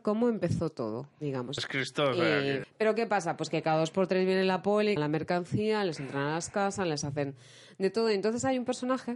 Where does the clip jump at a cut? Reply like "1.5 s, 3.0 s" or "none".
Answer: 1.6 s, 2.6 s, 5.0 s